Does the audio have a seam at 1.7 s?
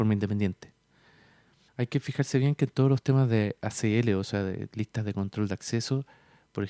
yes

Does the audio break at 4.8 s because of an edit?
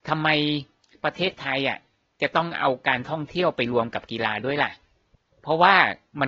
no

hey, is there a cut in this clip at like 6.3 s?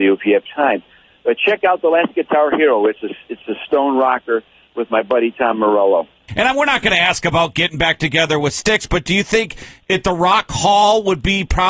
yes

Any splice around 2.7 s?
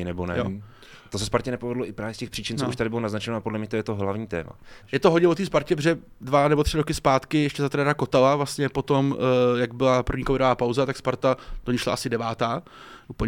no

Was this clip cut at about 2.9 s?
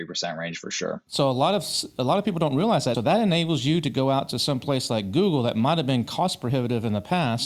yes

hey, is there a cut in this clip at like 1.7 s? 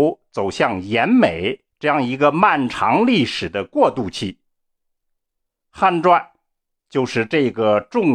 yes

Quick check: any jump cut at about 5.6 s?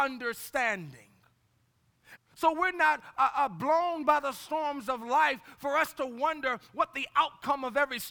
no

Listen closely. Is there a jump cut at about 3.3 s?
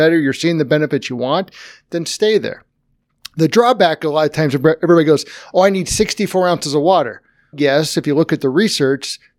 no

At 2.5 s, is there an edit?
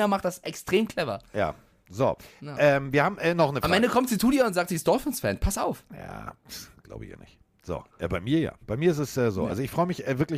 no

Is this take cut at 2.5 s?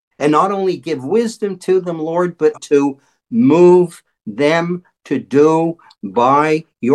yes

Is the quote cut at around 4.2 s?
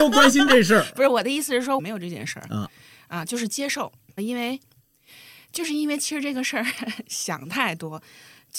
yes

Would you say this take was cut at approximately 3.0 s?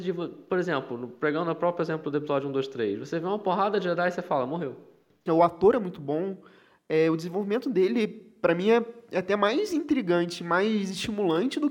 no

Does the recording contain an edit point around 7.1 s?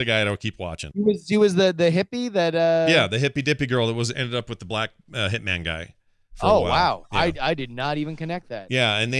no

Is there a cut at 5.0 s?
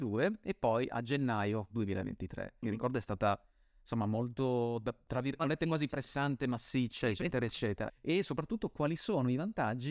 no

